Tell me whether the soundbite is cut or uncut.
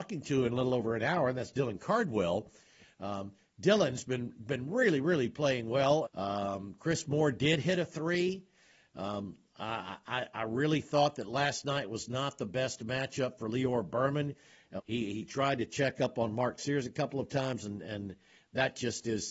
cut